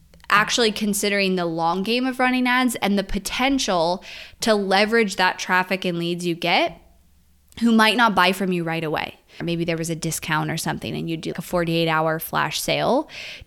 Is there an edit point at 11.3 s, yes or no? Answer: yes